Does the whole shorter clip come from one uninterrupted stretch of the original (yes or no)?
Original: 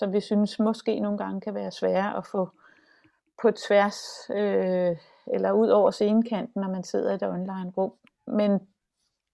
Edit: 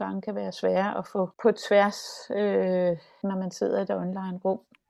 no